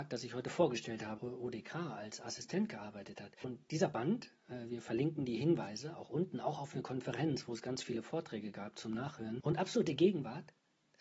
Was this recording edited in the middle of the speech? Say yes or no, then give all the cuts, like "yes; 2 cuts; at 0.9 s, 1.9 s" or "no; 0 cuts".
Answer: yes; 1 cut; at 1.2 s